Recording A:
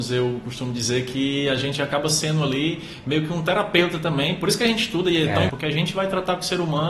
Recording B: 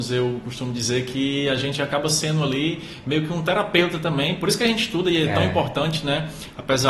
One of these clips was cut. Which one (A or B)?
A